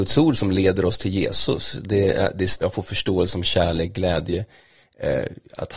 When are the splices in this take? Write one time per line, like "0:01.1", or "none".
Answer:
0:02.6